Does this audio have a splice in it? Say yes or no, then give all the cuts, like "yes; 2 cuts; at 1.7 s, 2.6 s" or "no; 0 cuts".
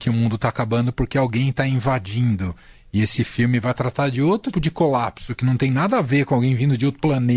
yes; 1 cut; at 4.5 s